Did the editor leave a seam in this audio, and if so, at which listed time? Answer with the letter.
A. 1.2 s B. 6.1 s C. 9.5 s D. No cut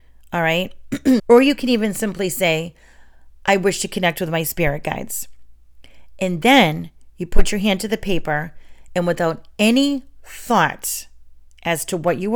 A